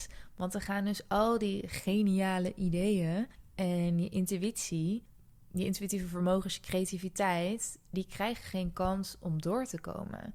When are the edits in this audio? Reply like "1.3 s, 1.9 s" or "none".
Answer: none